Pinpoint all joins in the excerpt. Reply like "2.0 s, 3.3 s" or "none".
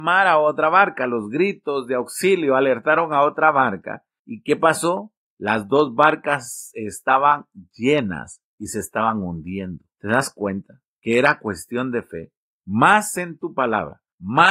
9.9 s, 12.5 s